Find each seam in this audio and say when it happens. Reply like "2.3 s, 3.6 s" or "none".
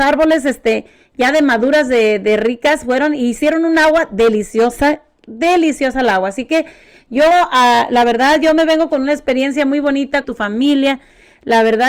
10.2 s